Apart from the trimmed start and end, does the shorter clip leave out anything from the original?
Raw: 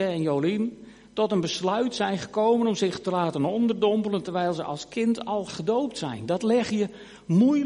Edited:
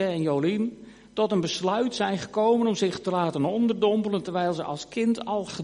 no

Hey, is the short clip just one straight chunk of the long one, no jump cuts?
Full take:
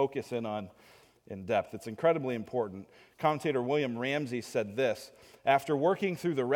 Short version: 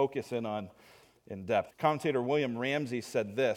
no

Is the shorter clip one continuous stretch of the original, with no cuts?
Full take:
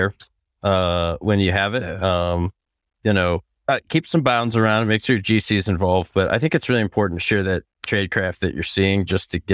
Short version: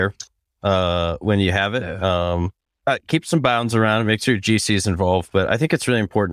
no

